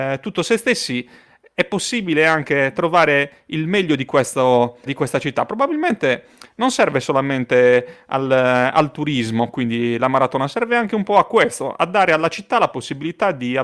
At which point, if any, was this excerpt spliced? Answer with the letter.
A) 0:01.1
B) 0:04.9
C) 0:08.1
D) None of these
B